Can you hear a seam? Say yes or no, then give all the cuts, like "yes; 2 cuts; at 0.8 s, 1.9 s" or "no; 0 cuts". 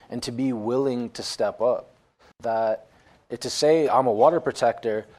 yes; 2 cuts; at 2.3 s, 3.9 s